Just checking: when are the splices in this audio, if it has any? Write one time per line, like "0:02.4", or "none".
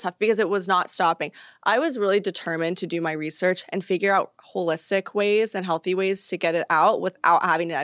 none